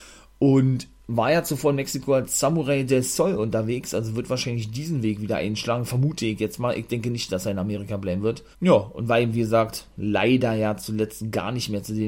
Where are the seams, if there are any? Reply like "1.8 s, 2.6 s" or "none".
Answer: 8.5 s